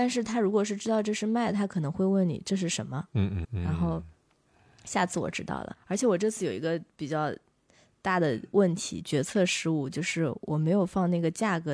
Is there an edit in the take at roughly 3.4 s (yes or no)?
yes